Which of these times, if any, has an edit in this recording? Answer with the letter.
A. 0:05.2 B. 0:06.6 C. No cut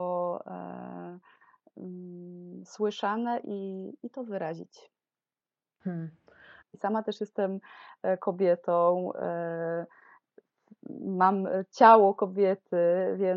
B